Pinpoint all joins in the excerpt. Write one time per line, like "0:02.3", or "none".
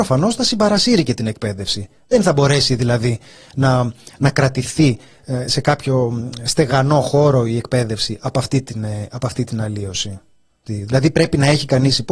0:10.7